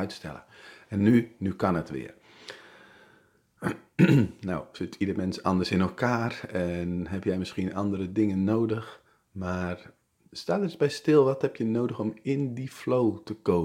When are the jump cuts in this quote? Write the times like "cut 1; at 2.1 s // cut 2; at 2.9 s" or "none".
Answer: none